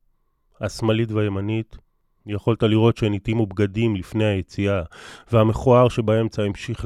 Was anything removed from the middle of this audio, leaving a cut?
no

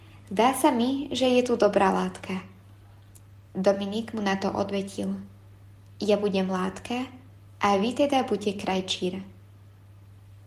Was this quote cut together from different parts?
no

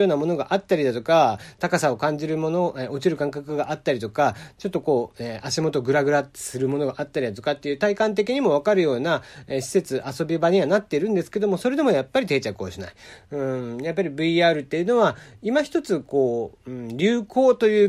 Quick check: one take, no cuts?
yes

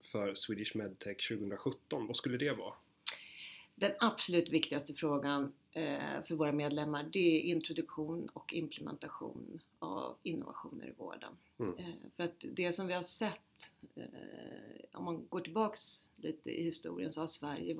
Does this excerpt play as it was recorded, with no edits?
yes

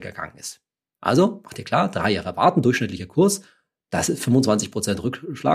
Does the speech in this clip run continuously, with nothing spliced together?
yes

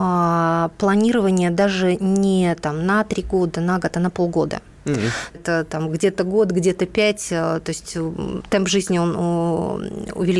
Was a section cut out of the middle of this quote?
yes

